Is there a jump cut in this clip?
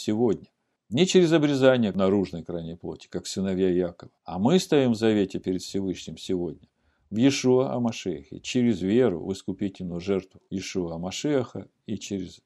yes; 1 cut; at 4.2 s

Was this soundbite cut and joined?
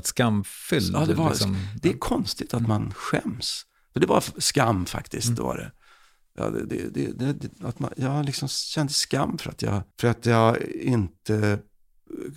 yes; 2 cuts; at 7.9 s, 9.9 s

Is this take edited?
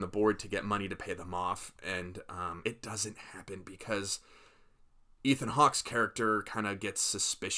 yes; 1 cut; at 2.6 s

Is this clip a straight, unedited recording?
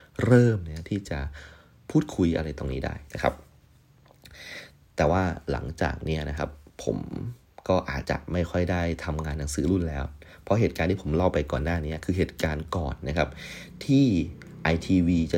no; 1 cut; at 8.0 s

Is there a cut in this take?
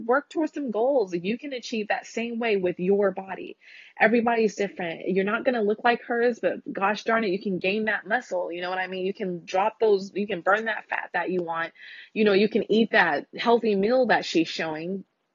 no; 0 cuts

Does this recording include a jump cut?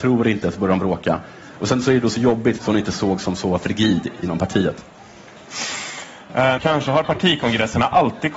yes; 2 cuts; at 2.6 s, 6.6 s

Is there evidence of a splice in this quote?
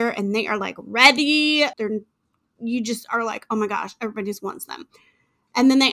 yes; 1 cut; at 1.7 s

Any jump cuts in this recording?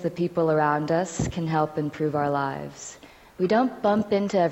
no; 0 cuts

